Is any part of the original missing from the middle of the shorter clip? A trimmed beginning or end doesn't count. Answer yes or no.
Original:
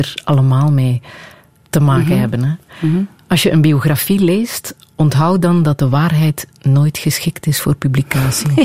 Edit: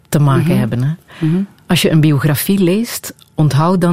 no